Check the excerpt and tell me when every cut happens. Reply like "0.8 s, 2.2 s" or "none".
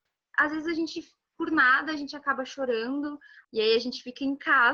3.4 s